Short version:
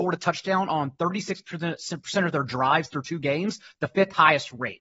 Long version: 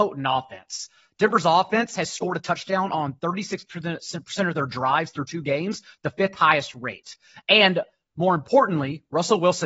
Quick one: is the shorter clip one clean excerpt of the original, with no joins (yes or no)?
yes